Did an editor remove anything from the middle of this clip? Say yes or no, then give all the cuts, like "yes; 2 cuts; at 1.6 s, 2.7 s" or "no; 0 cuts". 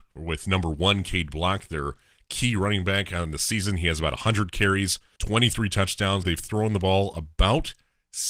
yes; 2 cuts; at 5.2 s, 6.2 s